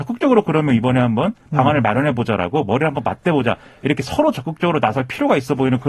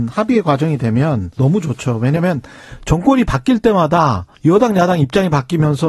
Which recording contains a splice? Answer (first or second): second